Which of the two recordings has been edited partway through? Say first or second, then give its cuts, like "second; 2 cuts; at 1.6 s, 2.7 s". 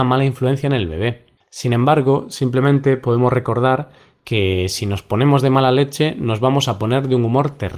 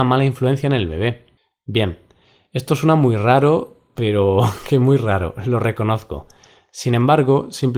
first; 1 cut; at 1.4 s